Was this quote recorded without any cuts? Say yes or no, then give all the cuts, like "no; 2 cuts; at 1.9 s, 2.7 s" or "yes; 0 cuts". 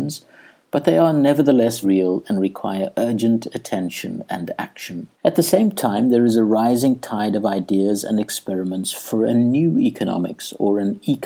no; 2 cuts; at 1.8 s, 5.1 s